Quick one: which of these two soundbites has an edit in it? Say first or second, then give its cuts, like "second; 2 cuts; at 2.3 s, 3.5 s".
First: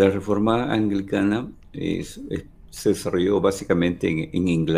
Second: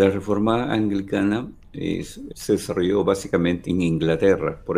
second; 2 cuts; at 2.3 s, 3.6 s